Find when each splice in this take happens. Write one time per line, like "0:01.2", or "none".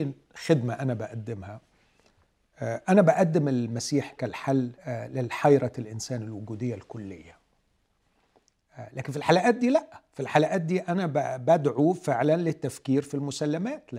0:04.8